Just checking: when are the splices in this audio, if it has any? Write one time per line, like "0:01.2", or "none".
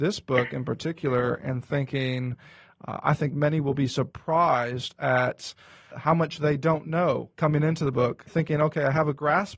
0:05.9
0:08.3

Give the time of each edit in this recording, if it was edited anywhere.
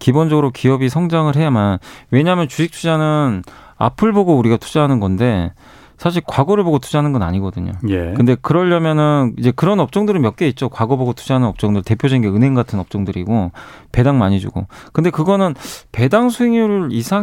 none

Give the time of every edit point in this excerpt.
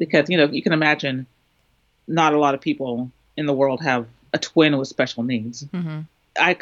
0:04.3

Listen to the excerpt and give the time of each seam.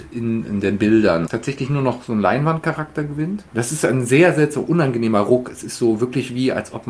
0:01.3
0:03.5

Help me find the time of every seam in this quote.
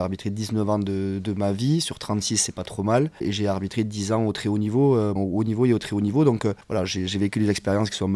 0:05.2

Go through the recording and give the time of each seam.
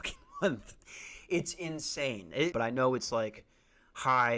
0:02.5

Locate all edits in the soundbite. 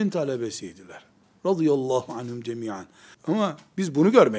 0:03.1

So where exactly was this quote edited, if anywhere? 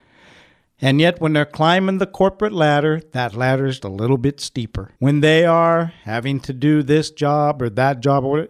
0:03.8
0:05.0

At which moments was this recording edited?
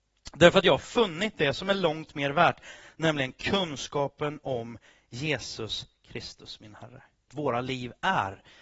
0:07.3

